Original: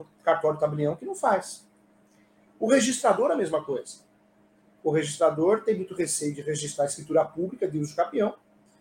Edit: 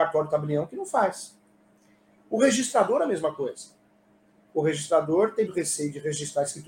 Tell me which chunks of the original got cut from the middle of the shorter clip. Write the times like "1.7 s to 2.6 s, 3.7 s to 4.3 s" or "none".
5.8 s to 5.9 s